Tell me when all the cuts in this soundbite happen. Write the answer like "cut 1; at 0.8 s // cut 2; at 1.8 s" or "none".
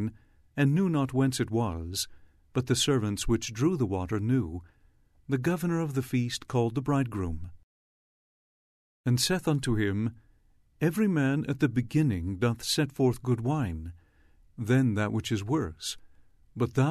cut 1; at 14.4 s